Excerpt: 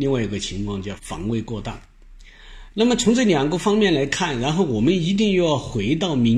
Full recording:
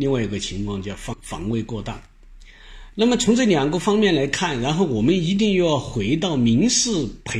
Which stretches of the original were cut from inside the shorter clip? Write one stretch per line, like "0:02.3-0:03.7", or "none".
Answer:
0:01.0-0:01.2